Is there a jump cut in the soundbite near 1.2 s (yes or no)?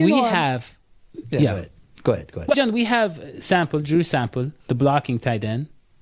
no